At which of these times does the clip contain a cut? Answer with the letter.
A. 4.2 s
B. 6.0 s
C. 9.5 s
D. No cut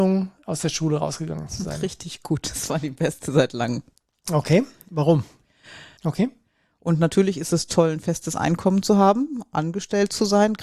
B